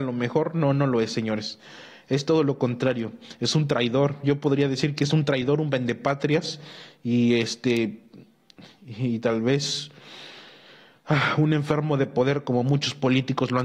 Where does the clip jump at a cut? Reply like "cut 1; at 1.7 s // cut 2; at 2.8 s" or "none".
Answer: none